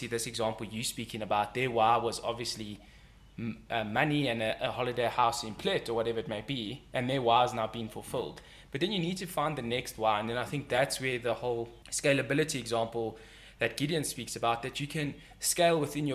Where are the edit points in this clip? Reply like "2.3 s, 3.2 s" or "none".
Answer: 11.8 s